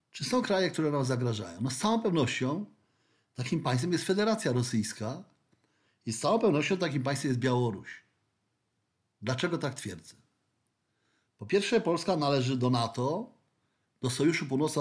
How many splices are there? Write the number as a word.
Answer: zero